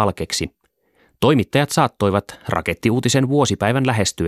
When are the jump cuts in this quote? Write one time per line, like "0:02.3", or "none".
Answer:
none